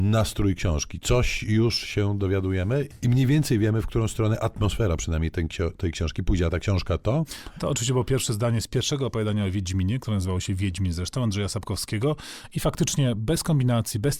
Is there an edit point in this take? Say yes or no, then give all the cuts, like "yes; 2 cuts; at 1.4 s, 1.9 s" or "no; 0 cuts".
no; 0 cuts